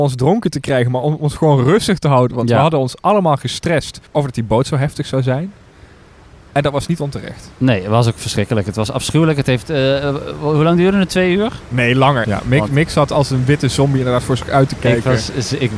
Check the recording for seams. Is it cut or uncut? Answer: cut